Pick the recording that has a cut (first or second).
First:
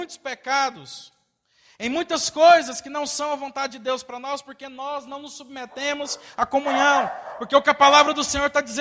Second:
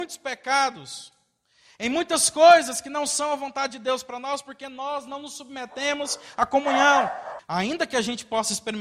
second